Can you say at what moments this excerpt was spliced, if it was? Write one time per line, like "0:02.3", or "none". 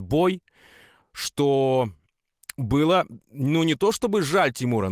none